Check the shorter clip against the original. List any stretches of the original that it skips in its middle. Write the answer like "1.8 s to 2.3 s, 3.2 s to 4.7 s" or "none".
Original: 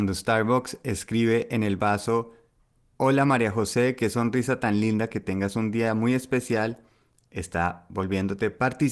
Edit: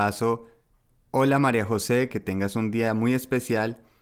4.0 s to 5.1 s